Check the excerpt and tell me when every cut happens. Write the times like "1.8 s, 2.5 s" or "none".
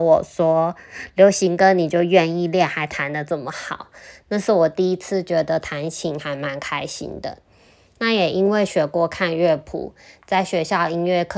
none